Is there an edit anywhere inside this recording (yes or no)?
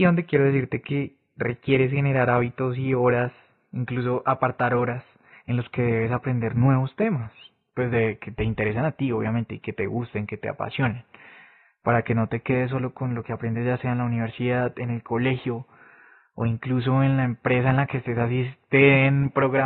no